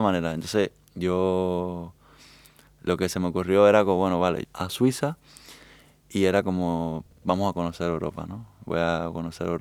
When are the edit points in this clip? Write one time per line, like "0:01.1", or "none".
0:04.4